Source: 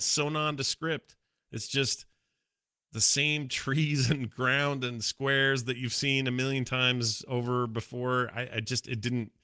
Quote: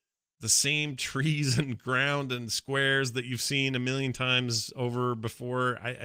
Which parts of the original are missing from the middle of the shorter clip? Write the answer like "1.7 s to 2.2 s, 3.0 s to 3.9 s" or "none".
none